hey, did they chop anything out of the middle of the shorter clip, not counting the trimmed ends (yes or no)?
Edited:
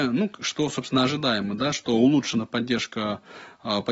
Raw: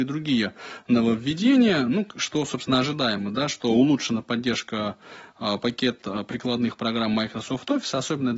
no